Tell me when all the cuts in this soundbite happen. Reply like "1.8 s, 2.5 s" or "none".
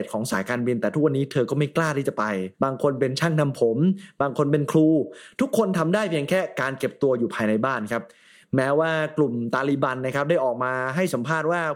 2.5 s